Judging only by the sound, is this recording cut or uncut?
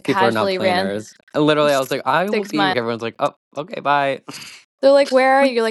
cut